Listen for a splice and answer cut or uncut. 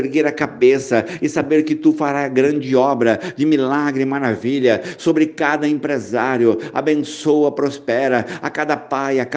uncut